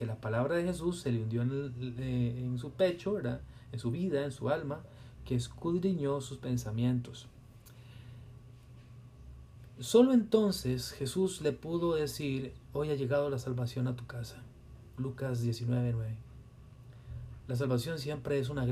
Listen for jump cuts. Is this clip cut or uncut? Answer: cut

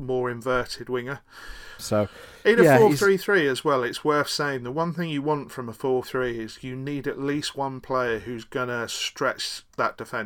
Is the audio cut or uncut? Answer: cut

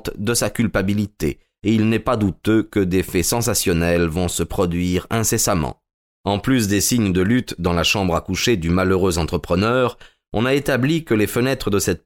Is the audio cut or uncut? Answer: cut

